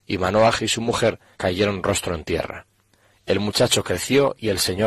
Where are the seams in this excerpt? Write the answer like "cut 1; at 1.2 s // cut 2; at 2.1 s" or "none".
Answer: cut 1; at 1.4 s // cut 2; at 3.1 s